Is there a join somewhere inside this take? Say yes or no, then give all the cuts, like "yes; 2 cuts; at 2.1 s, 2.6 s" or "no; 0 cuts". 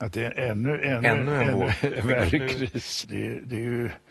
yes; 2 cuts; at 2.0 s, 3.0 s